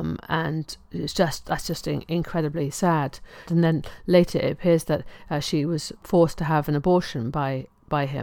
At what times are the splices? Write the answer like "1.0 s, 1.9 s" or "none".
3.5 s